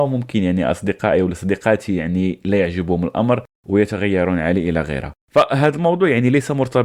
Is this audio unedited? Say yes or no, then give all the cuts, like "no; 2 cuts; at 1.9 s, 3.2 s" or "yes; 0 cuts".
no; 1 cut; at 5.2 s